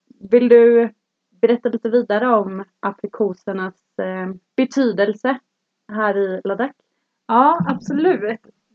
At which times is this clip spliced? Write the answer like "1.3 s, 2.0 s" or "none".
none